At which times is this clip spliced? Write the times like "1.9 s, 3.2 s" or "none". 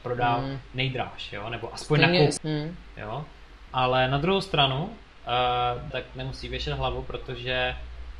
2.4 s, 3.7 s, 5.9 s